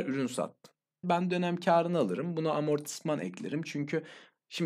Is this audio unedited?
no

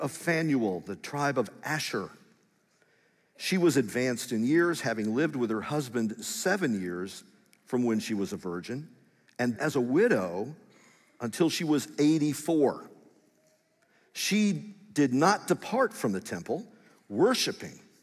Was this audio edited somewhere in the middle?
yes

